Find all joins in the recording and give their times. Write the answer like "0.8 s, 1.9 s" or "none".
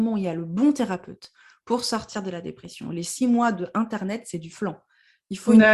none